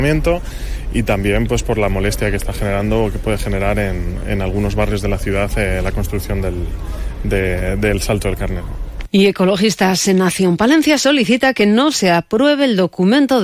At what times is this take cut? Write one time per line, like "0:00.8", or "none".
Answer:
none